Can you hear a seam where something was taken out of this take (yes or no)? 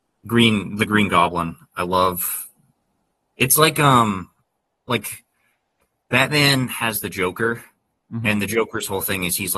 no